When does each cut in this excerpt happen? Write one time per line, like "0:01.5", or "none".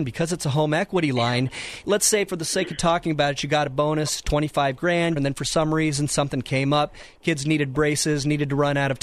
0:05.2